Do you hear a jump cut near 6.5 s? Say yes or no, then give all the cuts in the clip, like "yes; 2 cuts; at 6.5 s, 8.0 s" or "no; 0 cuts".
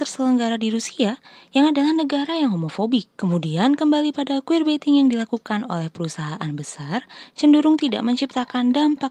no; 1 cut; at 3.1 s